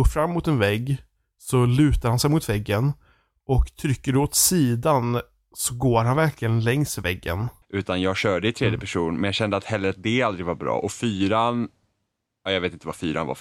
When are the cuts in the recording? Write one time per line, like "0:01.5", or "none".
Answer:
0:07.6